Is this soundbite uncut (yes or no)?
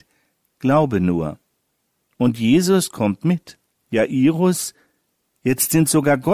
no